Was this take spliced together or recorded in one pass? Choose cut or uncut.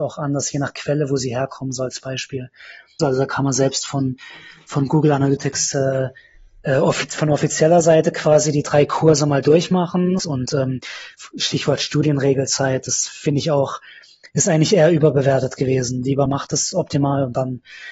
cut